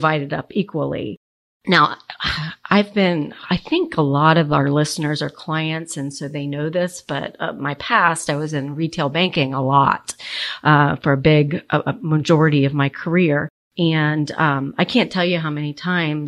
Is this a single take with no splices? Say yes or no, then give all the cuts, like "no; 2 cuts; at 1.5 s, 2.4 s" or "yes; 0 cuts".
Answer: yes; 0 cuts